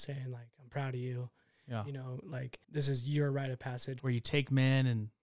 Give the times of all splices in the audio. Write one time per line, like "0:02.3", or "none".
0:02.6
0:04.0